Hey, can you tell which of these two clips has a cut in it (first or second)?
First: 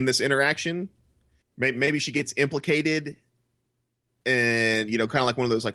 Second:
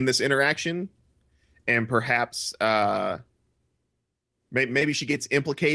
first